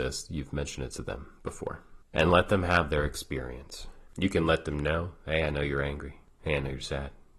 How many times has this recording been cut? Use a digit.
1